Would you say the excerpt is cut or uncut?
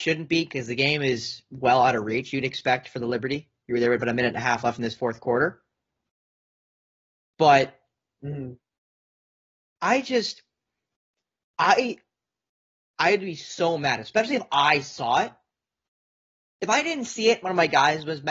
uncut